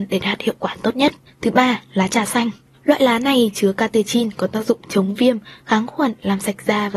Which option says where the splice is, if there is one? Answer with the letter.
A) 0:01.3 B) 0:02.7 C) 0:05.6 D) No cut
B